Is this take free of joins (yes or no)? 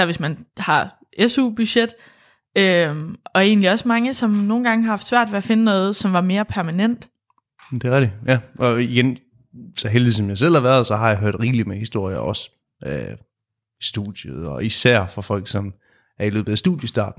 yes